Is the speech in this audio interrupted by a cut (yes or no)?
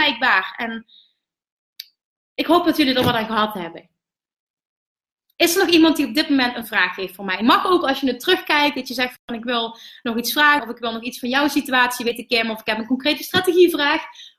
yes